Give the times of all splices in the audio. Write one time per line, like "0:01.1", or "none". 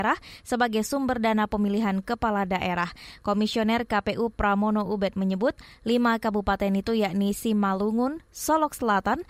0:08.3